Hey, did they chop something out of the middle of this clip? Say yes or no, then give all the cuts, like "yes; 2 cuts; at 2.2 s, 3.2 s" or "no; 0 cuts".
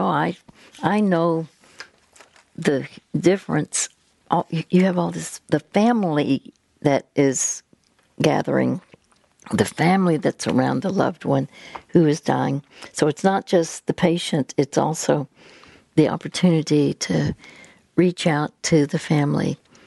no; 0 cuts